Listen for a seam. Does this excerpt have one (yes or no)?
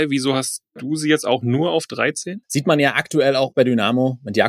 yes